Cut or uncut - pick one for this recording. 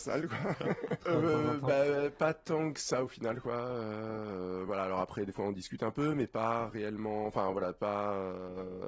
cut